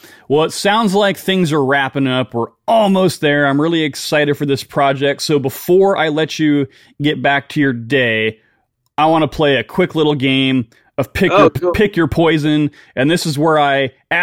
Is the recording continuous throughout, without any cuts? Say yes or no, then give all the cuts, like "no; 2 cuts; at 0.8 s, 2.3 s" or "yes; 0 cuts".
yes; 0 cuts